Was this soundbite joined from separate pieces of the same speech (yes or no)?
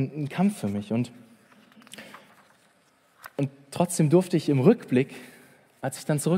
no